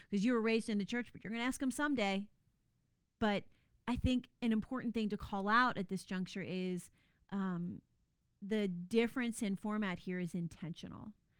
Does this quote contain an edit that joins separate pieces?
yes; 1 cut; at 3.2 s

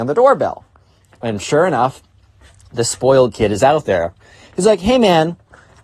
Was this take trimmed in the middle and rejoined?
no; 0 cuts

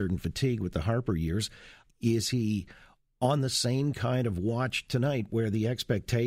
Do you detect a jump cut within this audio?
yes; 1 cut; at 1.8 s

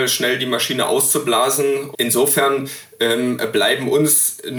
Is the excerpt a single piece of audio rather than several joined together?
no; 1 cut; at 1.9 s

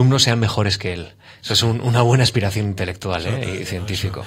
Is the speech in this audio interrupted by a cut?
no; 0 cuts

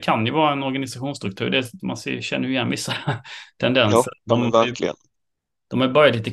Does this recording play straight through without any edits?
no; 2 cuts; at 1.8 s, 4.2 s

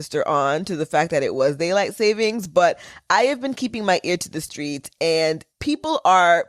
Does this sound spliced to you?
yes; 1 cut; at 5.5 s

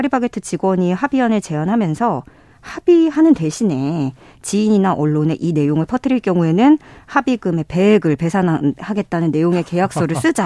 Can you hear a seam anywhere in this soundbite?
no; 0 cuts

